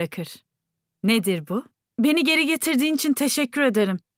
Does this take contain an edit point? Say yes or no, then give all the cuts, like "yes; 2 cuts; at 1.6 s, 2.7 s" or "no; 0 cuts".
yes; 1 cut; at 1.8 s